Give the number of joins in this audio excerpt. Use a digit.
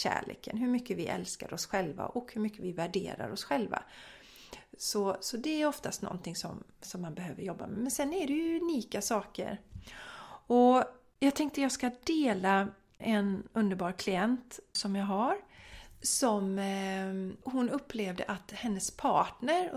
0